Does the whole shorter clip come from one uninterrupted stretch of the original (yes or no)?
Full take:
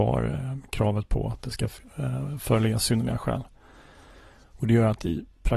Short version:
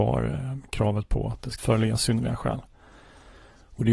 no